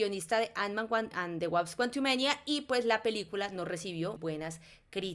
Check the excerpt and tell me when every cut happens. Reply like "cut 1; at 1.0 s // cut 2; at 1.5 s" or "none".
cut 1; at 1.1 s // cut 2; at 4.2 s